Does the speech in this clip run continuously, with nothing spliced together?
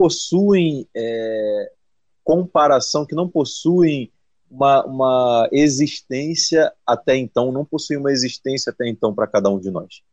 yes; 0 cuts

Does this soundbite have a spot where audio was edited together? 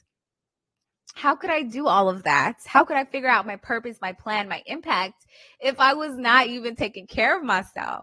no; 0 cuts

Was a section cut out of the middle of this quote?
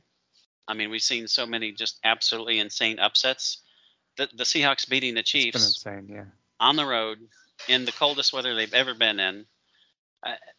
no; 0 cuts

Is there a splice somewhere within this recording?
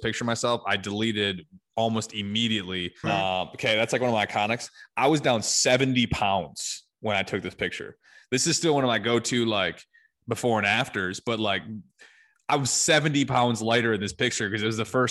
yes; 1 cut; at 3.0 s

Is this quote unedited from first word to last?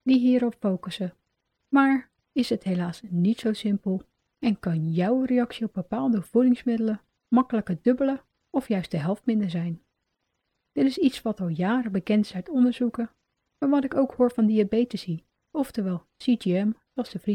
no; 2 cuts; at 2.2 s, 15.5 s

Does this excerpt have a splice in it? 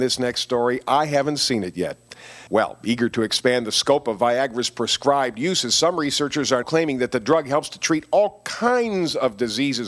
yes; 2 cuts; at 2.5 s, 6.6 s

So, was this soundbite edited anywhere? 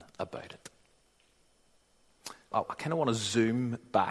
yes; 1 cut; at 2.5 s

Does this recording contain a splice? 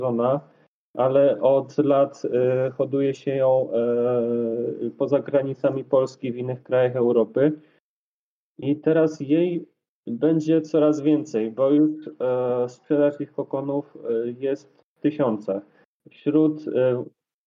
yes; 1 cut; at 15.9 s

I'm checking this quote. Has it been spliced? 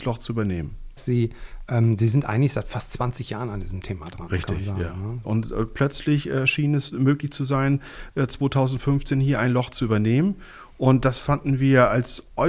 yes; 2 cuts; at 1.0 s, 5.2 s

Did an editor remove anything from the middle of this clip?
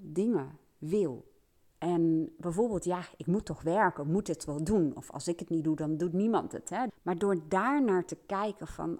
yes; 2 cuts; at 1.6 s, 6.9 s

